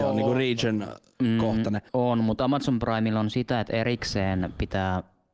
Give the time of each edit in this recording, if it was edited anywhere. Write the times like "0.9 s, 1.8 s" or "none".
1.9 s